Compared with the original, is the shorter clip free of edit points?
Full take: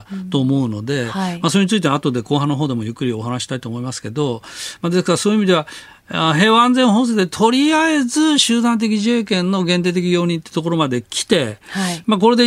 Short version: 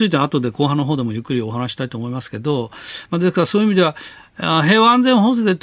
yes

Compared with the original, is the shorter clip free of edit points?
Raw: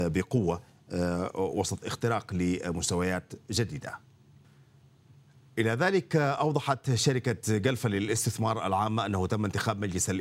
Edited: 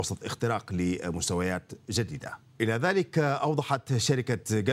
no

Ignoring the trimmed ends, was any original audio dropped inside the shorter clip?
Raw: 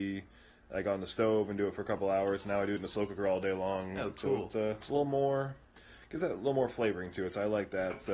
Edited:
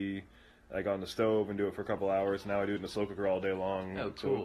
no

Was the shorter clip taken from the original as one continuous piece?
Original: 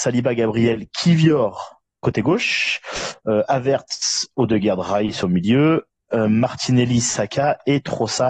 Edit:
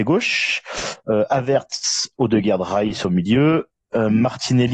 yes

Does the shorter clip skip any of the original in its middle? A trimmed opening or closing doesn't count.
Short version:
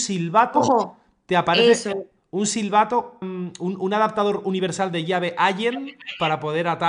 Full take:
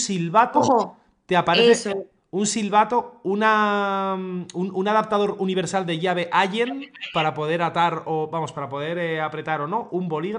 yes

